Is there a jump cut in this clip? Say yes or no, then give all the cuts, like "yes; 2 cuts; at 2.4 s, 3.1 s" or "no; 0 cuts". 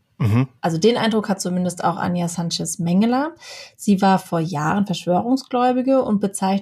no; 0 cuts